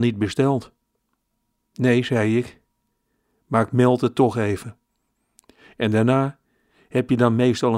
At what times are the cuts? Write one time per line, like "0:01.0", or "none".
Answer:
none